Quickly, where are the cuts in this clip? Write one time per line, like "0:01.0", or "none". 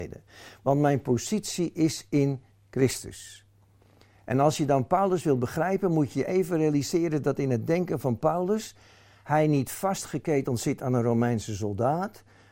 none